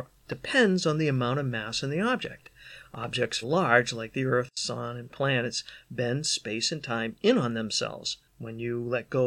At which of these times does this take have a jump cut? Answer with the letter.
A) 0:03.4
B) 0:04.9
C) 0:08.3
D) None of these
A